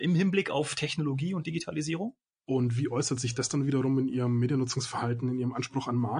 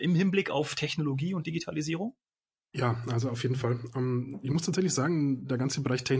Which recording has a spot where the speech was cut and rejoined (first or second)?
first